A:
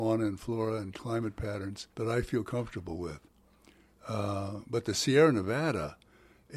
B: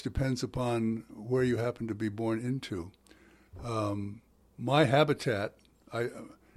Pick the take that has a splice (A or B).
A